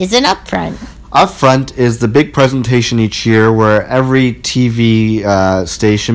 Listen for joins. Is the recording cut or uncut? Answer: uncut